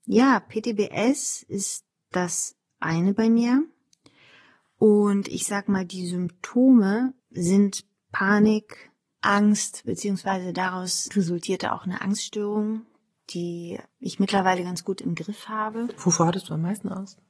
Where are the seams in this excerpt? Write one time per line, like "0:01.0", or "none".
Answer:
0:07.2